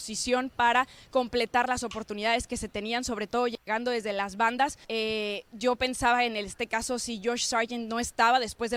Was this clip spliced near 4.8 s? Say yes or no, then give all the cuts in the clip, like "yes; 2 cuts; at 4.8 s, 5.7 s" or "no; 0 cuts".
yes; 1 cut; at 4.8 s